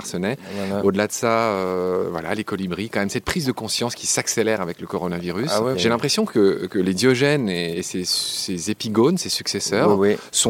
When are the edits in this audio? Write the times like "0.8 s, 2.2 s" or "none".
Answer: 5.7 s